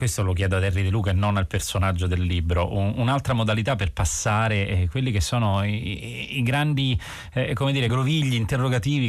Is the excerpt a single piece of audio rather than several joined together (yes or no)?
yes